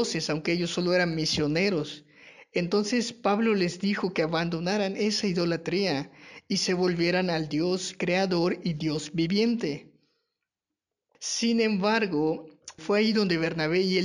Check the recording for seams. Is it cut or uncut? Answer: cut